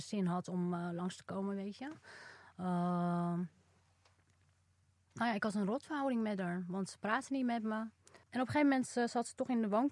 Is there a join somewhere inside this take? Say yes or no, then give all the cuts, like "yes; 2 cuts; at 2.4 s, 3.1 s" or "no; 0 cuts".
yes; 1 cut; at 8.2 s